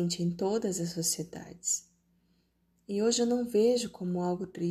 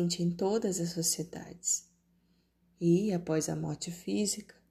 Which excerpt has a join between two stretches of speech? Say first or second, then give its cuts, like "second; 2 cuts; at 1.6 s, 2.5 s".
second; 1 cut; at 2.6 s